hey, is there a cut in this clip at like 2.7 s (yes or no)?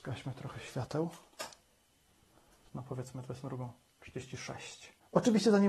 yes